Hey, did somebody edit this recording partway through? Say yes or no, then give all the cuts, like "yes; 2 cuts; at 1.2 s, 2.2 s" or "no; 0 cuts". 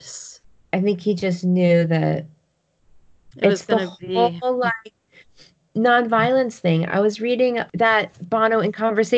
no; 0 cuts